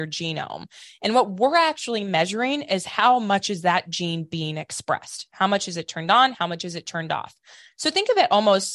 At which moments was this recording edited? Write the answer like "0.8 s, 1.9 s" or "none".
none